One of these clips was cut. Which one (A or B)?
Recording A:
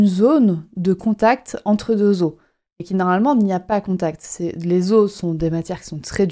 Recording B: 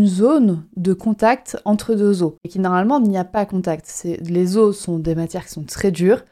B